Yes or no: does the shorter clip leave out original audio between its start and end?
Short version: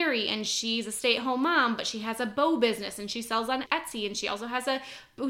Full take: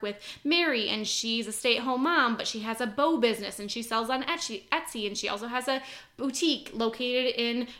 yes